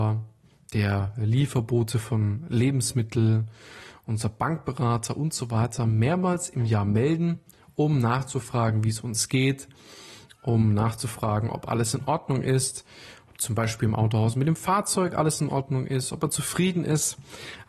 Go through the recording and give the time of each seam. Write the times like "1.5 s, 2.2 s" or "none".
none